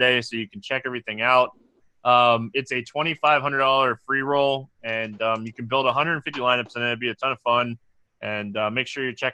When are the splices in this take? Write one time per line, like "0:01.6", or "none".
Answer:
none